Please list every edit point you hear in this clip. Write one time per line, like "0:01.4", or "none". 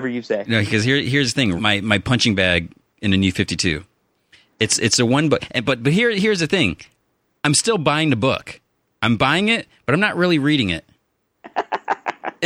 0:01.6